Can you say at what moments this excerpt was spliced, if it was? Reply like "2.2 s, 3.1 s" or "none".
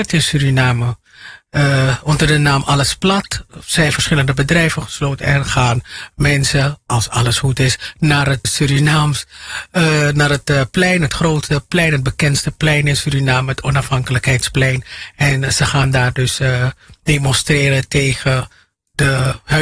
8.4 s